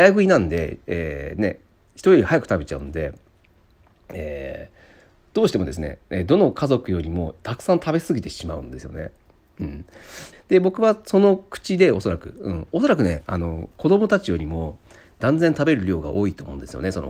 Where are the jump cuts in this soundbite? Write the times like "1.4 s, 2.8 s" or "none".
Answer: 10.3 s